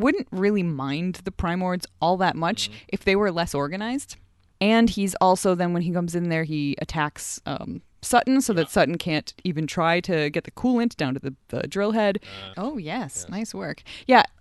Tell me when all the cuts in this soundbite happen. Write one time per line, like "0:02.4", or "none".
0:04.5
0:12.5